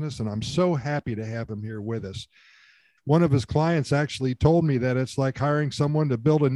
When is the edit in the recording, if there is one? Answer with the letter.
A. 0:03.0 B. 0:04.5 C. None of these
A